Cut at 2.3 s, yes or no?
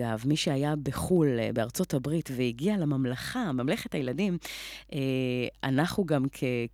no